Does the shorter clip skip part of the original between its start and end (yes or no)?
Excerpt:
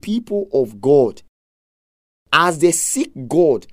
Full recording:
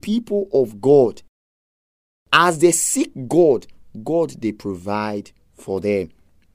no